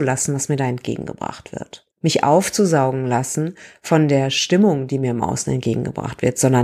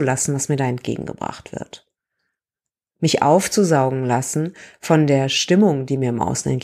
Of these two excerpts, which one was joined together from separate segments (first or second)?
first